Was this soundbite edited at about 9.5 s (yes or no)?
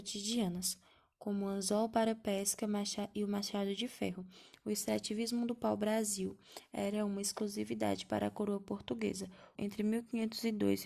yes